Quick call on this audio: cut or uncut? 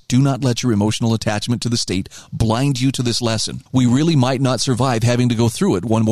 cut